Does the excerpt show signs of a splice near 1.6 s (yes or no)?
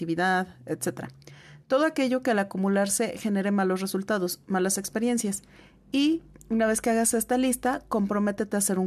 no